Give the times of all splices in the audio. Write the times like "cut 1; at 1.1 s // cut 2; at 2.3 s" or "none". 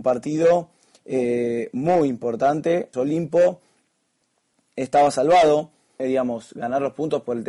cut 1; at 2.9 s // cut 2; at 6.0 s